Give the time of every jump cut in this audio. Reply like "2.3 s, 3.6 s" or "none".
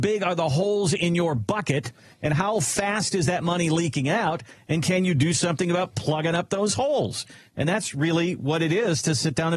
none